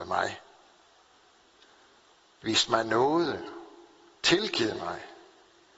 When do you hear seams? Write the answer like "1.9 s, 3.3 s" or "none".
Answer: none